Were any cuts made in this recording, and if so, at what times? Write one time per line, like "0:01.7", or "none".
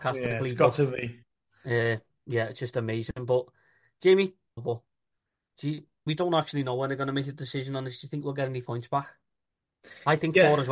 0:04.6
0:06.1